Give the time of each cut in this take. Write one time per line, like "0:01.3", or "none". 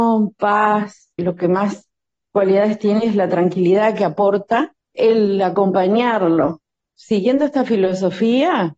0:01.2
0:04.9